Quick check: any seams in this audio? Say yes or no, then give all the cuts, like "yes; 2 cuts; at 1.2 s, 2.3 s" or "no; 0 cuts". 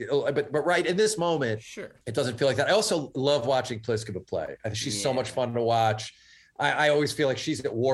yes; 1 cut; at 2.0 s